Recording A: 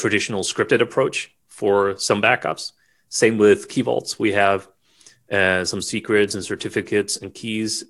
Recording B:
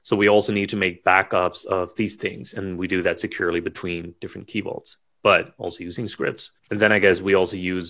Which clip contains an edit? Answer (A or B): B